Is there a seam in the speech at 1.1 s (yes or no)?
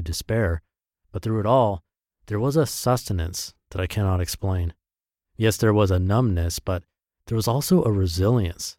no